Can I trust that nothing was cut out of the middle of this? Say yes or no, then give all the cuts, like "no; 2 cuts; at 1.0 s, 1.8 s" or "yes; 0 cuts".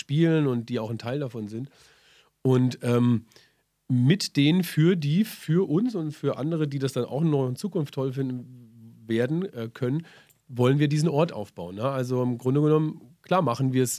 yes; 0 cuts